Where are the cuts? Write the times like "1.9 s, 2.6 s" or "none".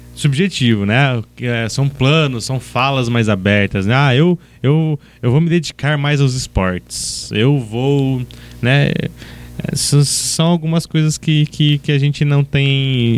none

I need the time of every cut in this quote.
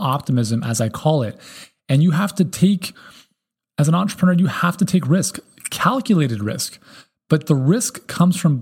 none

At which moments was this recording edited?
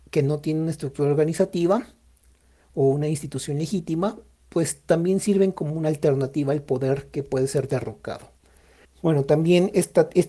8.8 s

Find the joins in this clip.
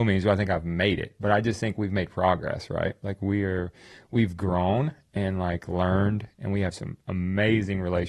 none

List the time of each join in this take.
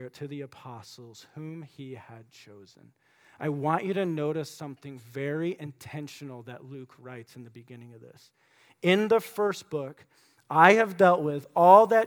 none

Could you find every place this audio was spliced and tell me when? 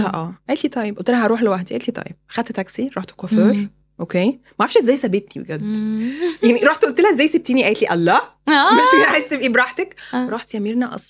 none

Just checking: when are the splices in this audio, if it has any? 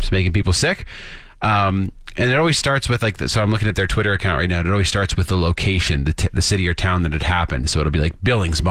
none

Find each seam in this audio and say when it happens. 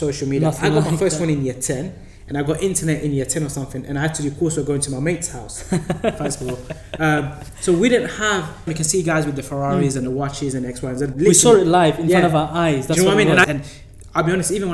8.7 s, 11.1 s, 13.4 s

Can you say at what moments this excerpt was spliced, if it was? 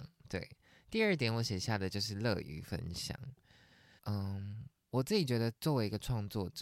4.0 s

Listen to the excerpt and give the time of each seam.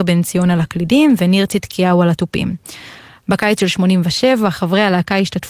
none

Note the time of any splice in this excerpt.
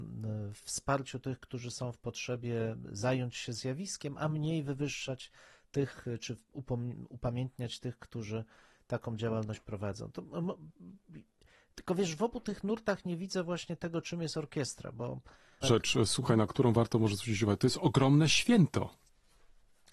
15.6 s

